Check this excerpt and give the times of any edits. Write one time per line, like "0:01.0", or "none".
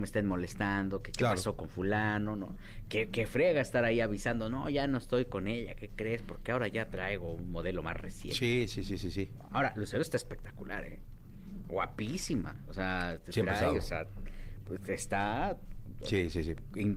none